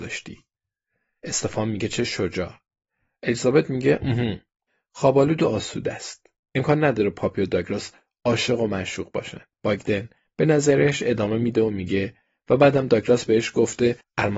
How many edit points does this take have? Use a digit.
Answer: 1